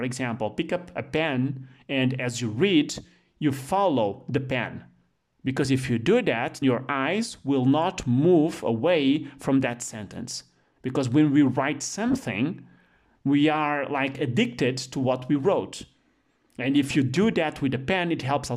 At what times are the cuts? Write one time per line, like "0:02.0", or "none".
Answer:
0:06.6